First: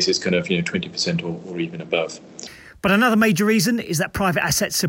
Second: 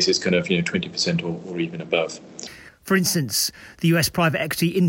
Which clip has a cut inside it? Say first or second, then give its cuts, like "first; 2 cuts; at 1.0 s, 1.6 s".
second; 1 cut; at 2.7 s